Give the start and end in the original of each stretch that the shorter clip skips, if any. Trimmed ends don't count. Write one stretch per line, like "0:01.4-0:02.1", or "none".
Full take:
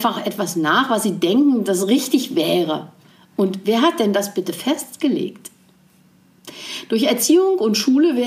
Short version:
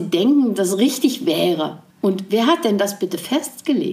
0:03.0-0:03.2